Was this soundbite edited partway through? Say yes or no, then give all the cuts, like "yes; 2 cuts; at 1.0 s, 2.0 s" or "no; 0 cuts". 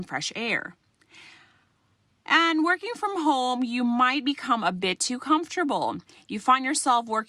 no; 0 cuts